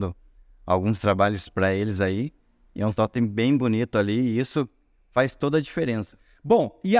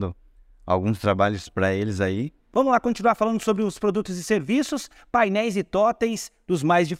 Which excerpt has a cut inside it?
second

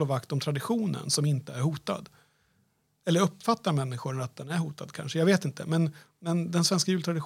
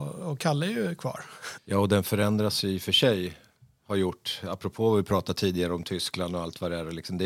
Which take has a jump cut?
second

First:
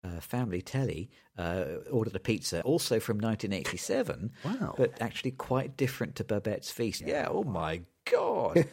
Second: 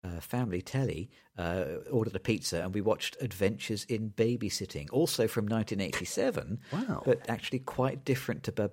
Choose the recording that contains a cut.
first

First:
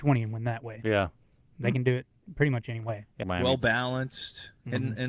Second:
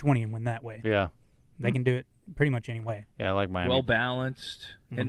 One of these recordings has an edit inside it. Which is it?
first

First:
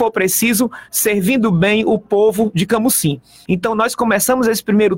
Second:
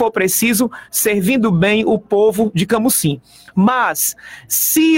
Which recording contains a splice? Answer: first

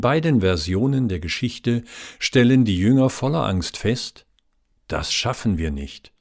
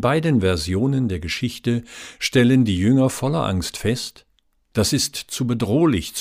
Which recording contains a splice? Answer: second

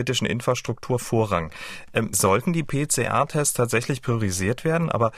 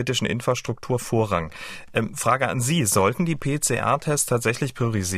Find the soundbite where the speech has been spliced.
first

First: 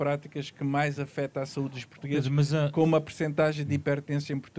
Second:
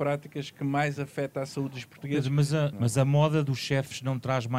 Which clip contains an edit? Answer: second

